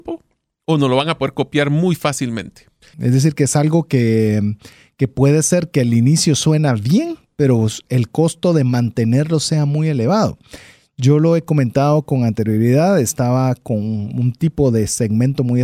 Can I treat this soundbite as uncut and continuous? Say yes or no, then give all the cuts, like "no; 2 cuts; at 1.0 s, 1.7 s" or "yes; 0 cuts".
no; 1 cut; at 2.9 s